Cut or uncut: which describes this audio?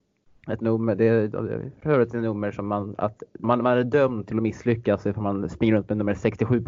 cut